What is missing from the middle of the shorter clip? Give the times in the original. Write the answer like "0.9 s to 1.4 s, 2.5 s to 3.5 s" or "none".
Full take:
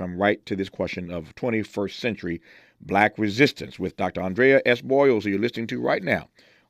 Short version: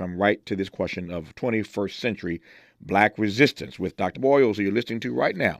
4.1 s to 4.8 s